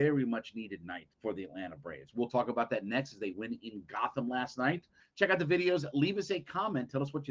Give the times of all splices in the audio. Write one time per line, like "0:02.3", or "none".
0:01.1
0:05.0